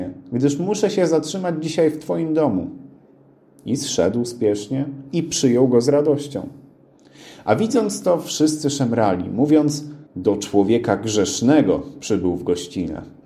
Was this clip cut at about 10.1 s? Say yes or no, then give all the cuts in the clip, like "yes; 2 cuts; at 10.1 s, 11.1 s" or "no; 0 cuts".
yes; 1 cut; at 10.1 s